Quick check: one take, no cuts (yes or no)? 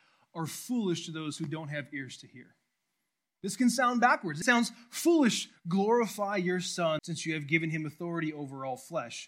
no